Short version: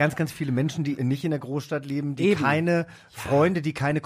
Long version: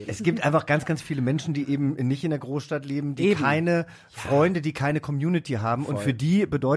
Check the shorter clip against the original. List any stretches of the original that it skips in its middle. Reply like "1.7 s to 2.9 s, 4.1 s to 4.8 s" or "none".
1.7 s to 2.0 s